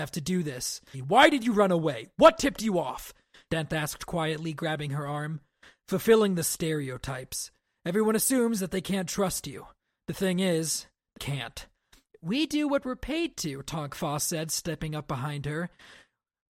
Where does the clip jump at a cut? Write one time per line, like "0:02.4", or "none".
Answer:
0:00.9
0:03.5
0:11.2